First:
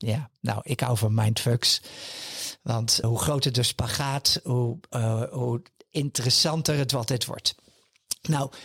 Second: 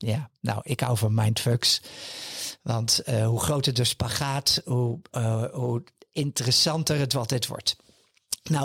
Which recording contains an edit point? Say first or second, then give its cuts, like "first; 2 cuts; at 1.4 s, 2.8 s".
first; 1 cut; at 3.0 s